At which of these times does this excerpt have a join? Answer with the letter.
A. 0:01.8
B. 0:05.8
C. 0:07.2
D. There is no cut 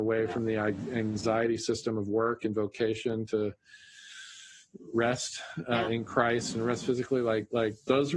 D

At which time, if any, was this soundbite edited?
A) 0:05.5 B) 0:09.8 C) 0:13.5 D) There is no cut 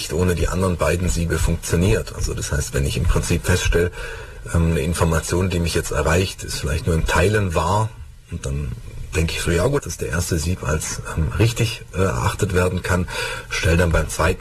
B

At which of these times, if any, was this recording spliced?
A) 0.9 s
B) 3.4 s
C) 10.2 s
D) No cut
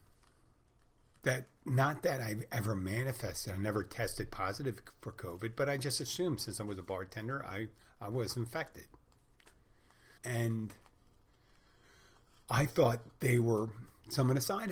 C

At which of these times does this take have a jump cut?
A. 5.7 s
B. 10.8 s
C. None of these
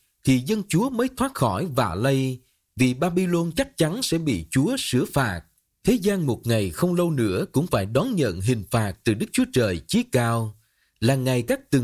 A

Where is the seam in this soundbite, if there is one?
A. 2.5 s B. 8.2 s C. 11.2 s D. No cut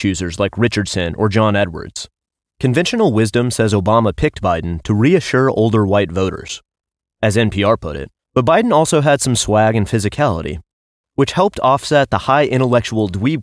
A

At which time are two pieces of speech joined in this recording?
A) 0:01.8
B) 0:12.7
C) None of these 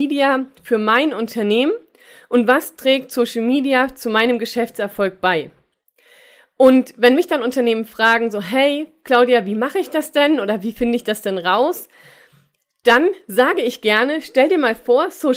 C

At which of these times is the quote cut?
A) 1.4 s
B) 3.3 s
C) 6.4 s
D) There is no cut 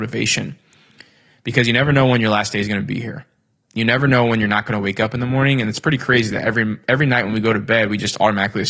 D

